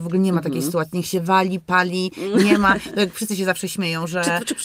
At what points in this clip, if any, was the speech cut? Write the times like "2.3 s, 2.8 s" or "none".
none